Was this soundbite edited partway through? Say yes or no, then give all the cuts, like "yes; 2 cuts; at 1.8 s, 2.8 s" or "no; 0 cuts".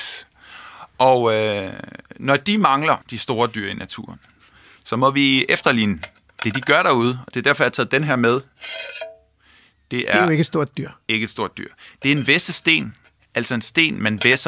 yes; 1 cut; at 3.0 s